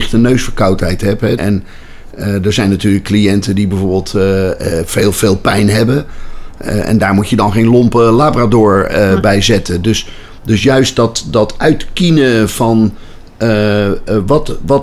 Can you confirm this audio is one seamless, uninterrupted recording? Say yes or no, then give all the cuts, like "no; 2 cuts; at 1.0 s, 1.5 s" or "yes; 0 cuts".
no; 1 cut; at 1.4 s